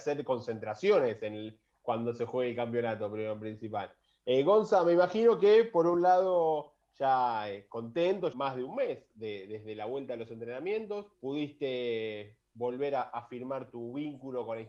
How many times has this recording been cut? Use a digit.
2